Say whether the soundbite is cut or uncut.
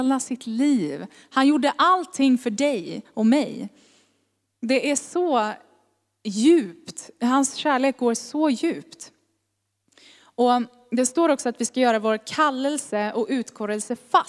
uncut